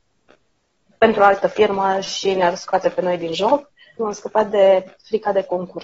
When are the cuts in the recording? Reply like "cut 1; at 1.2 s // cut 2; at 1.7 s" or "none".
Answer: cut 1; at 4.0 s